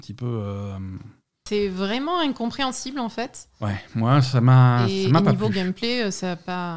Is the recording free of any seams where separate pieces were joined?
no; 1 cut; at 1.5 s

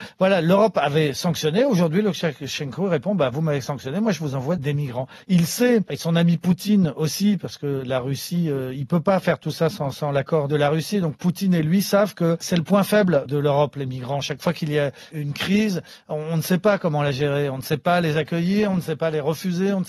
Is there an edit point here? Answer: no; 0 cuts

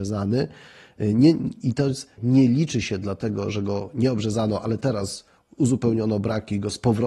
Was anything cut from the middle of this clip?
yes; 1 cut; at 2.2 s

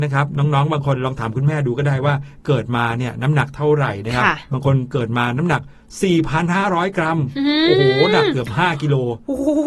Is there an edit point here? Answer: no; 0 cuts

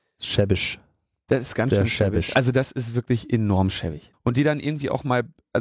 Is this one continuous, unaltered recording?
no; 2 cuts; at 2.3 s, 4.1 s

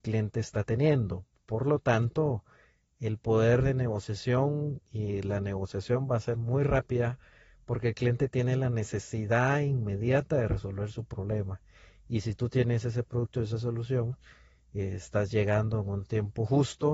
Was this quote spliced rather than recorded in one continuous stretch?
no; 0 cuts

